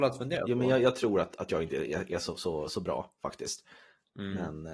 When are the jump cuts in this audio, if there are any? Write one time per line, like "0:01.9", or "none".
none